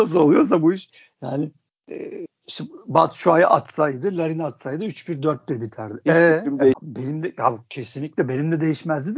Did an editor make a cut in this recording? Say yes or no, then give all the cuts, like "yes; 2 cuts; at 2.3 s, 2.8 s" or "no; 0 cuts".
yes; 1 cut; at 6.7 s